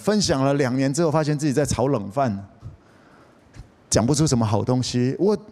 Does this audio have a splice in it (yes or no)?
no